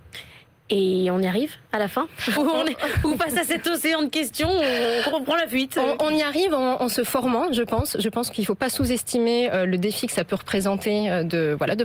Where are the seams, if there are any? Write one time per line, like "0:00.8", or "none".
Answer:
0:02.4